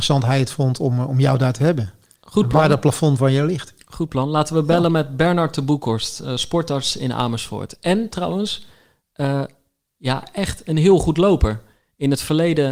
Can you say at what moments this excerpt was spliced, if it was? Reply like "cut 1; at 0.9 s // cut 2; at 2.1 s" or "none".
none